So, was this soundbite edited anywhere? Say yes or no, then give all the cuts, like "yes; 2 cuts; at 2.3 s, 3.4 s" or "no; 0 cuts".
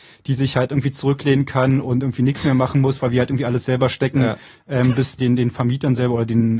yes; 1 cut; at 5.2 s